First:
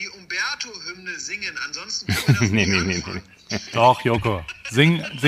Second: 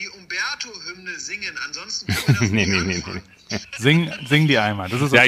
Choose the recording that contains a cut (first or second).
second